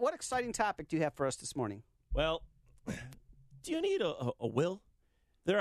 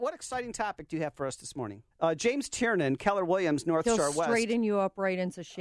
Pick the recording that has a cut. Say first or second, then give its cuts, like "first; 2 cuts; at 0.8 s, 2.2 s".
second; 1 cut; at 1.9 s